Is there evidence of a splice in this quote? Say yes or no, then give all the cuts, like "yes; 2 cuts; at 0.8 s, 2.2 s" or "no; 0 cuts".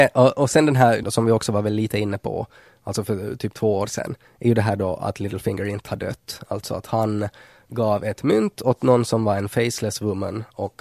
yes; 1 cut; at 1.0 s